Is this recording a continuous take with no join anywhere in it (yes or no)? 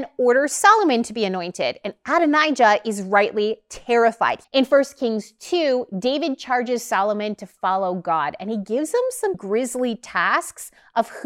no